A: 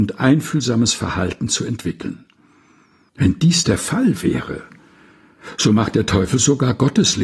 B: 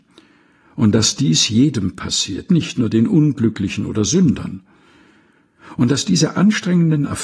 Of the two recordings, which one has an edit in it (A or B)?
A